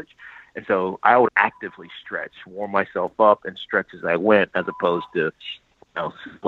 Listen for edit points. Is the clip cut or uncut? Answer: cut